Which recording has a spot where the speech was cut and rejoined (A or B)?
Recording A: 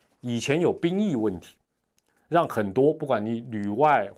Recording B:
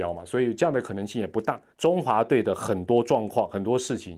B